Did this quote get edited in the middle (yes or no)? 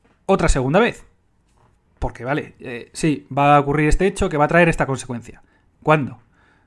yes